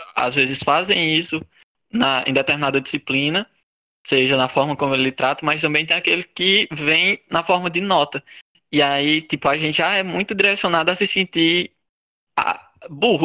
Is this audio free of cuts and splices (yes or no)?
yes